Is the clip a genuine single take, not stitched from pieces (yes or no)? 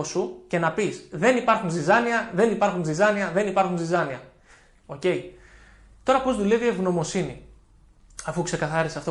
no